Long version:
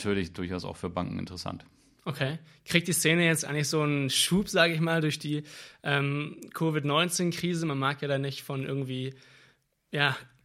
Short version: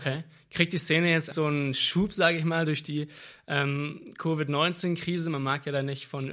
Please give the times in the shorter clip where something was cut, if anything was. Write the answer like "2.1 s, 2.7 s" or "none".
1.3 s

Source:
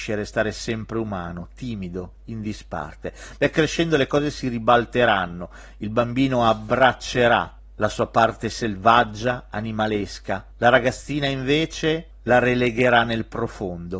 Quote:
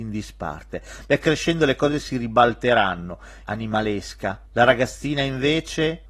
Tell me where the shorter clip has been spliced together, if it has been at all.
3.4 s

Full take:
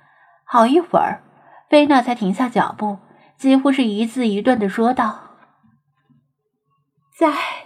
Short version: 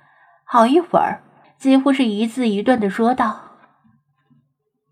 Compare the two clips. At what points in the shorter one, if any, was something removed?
1.4 s

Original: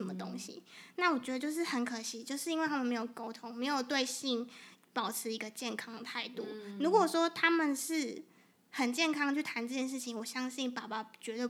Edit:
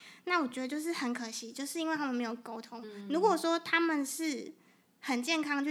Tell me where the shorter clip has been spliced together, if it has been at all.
2.8 s

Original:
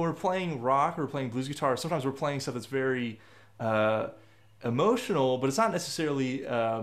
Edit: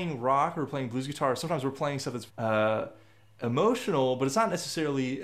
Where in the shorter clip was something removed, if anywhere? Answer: 2.3 s

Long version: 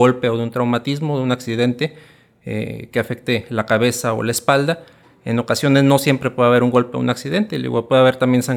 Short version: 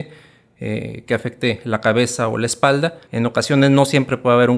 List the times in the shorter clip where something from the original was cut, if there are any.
3.0 s

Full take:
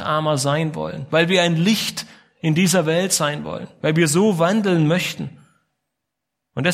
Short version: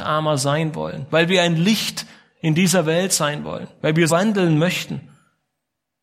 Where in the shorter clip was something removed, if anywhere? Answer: 4.1 s

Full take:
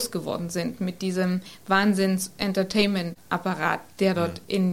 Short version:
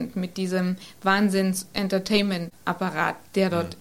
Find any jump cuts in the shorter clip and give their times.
none

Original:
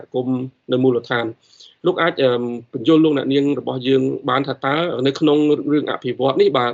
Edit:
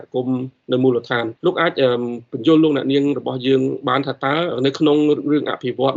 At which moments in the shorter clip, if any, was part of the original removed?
1.4 s

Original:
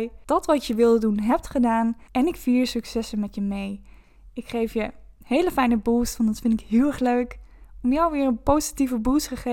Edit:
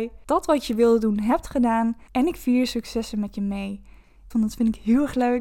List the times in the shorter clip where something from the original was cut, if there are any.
4.3 s

